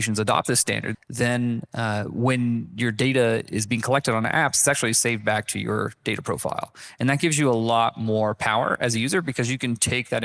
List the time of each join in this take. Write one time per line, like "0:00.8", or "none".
0:00.9